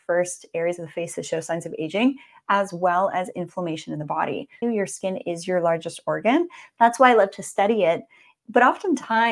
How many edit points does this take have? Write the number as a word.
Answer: one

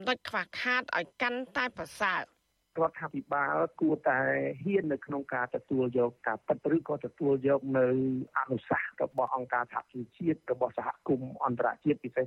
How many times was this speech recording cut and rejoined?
one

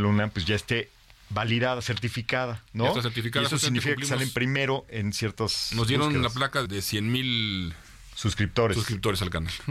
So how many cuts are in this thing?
one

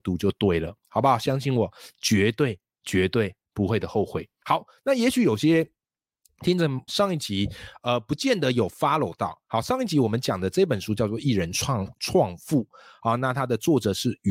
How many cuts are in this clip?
one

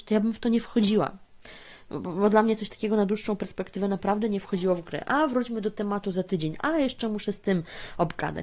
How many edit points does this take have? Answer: one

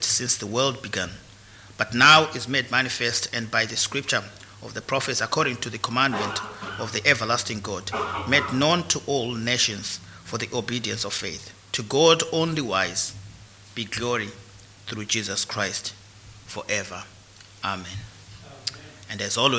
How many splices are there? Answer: zero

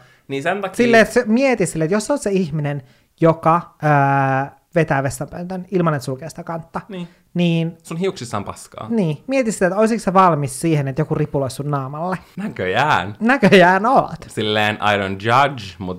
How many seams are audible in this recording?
zero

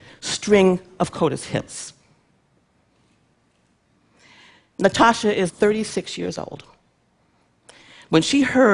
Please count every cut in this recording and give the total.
one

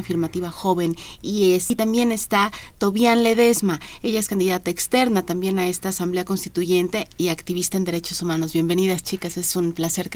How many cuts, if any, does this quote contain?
zero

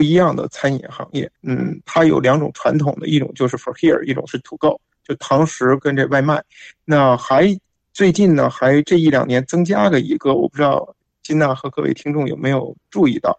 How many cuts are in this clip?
one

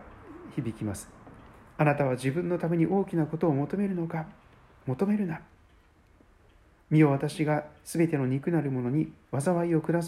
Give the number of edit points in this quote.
zero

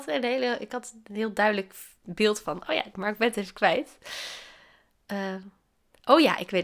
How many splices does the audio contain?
one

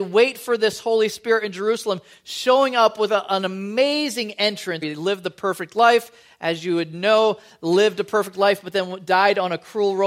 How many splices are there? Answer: one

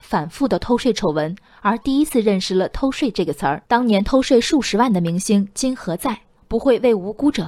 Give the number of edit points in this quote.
two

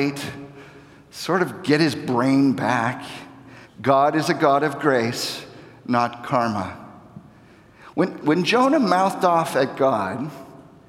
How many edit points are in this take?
two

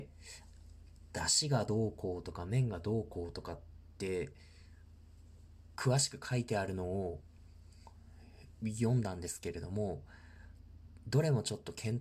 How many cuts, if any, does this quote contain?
zero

